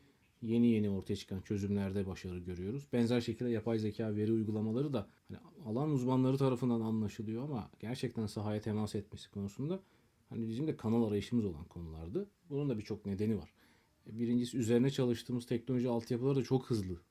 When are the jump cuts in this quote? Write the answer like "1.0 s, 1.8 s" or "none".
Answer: 5.2 s, 12.3 s